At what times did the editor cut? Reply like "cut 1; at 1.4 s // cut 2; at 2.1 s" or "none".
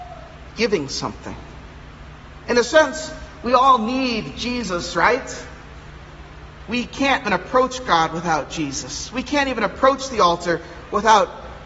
cut 1; at 7.2 s